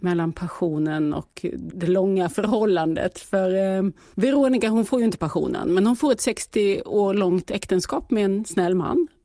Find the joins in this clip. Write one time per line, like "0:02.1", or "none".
none

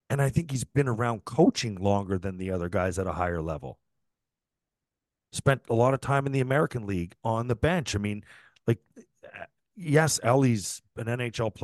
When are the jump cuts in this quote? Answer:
none

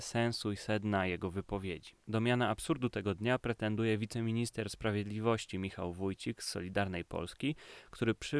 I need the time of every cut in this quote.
none

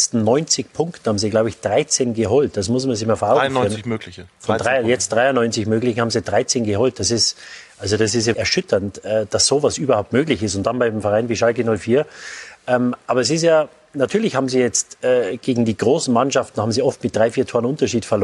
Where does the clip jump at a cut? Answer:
0:08.3

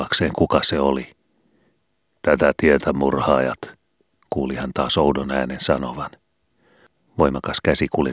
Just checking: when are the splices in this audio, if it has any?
none

